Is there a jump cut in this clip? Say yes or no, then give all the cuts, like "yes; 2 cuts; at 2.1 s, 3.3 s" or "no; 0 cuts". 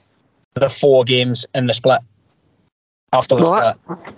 no; 0 cuts